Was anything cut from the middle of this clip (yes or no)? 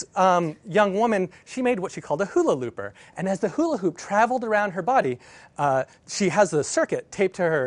no